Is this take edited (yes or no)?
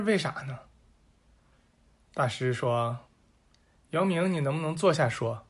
no